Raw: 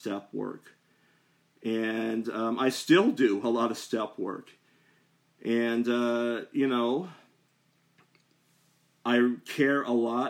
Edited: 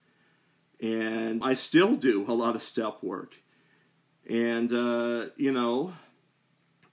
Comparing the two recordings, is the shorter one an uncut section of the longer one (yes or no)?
no